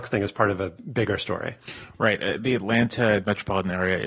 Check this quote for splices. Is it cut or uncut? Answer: uncut